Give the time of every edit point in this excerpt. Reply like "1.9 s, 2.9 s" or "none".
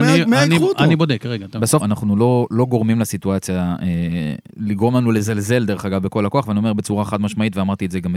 1.8 s, 4.5 s